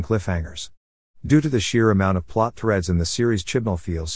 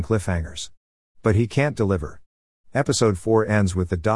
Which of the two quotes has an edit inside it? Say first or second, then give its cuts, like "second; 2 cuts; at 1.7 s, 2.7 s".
first; 1 cut; at 1.1 s